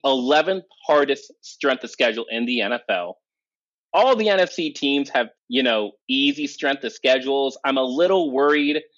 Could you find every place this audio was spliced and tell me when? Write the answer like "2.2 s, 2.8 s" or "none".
5.3 s